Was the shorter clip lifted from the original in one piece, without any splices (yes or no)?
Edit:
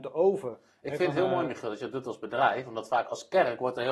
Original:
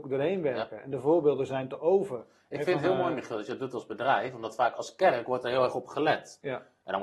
yes